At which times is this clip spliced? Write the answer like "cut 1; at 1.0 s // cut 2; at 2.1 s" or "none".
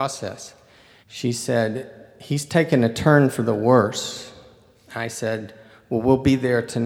cut 1; at 1.0 s